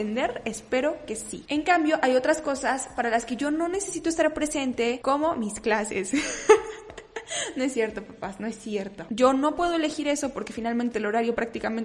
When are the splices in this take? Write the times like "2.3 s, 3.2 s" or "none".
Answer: 9.1 s

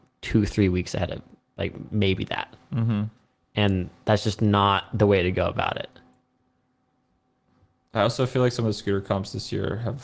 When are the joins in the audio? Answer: none

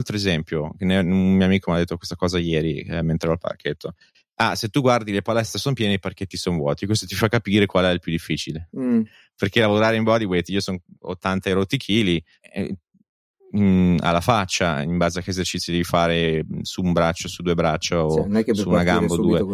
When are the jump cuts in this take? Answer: 12.4 s

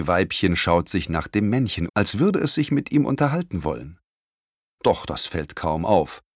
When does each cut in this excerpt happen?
1.9 s, 4.7 s

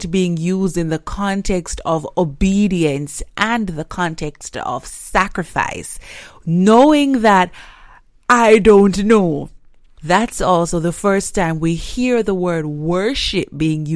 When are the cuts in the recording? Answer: 10.0 s

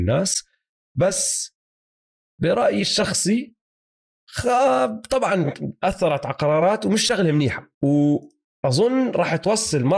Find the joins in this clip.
7.7 s

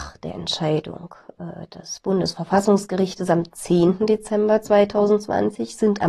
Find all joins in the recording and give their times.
none

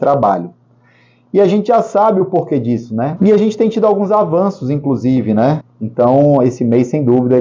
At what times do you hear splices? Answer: 3.2 s, 5.6 s

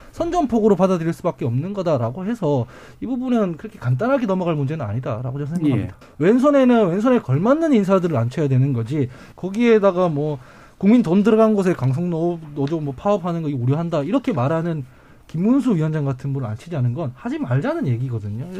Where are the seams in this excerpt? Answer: 6.0 s, 9.3 s

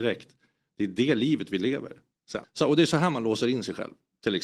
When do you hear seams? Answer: 2.4 s

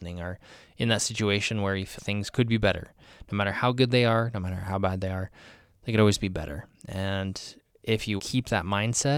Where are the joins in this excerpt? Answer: 2.0 s, 8.2 s

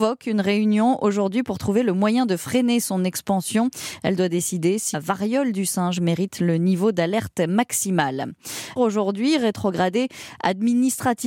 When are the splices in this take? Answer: 4.9 s, 8.8 s

